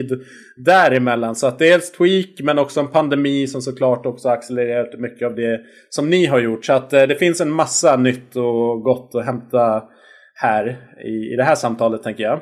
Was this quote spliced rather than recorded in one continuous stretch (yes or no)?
no